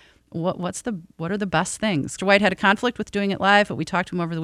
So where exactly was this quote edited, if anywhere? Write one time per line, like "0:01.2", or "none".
0:02.2